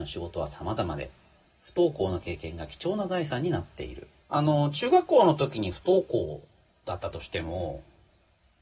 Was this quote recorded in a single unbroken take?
no; 1 cut; at 4.2 s

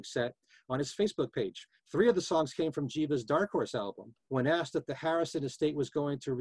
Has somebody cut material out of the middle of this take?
yes; 1 cut; at 4.3 s

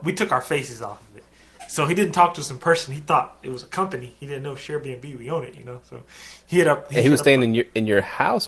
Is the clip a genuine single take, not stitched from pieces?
yes; 0 cuts

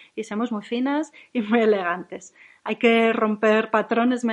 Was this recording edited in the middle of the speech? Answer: no; 0 cuts

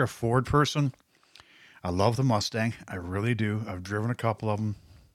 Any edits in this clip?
no; 0 cuts

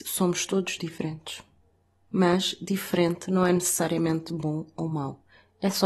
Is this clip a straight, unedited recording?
yes; 0 cuts

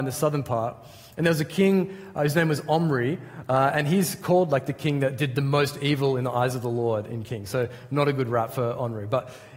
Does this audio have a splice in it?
no; 0 cuts

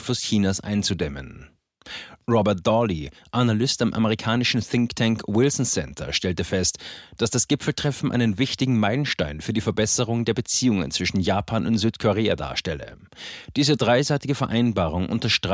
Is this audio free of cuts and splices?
yes; 0 cuts

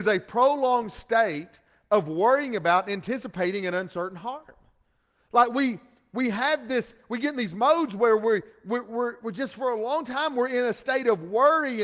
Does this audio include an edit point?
no; 0 cuts

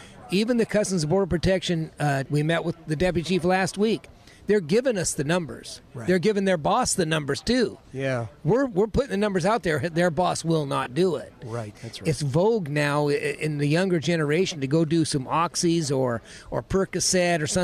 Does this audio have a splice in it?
yes; 2 cuts; at 2.3 s, 11.7 s

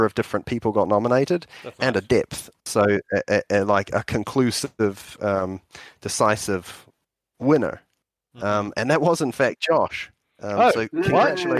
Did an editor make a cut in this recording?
no; 0 cuts

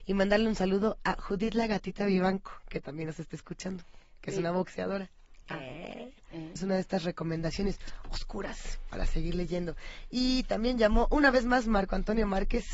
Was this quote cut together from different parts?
yes; 1 cut; at 6.6 s

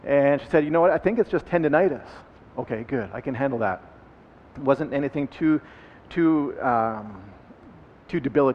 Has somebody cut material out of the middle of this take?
no; 0 cuts

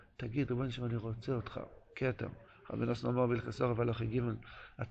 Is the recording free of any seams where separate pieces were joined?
yes; 0 cuts

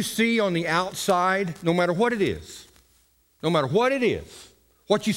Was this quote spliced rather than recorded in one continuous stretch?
no; 0 cuts

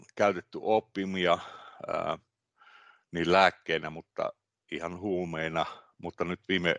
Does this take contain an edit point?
no; 0 cuts

